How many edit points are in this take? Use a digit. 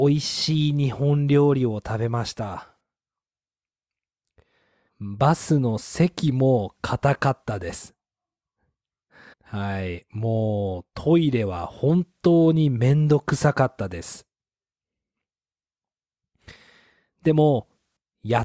2